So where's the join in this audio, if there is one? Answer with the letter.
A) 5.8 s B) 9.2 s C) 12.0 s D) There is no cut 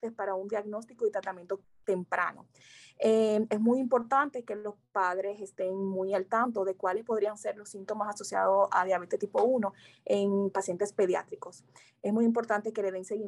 D